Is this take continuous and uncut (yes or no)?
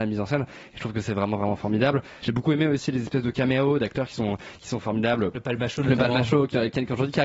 yes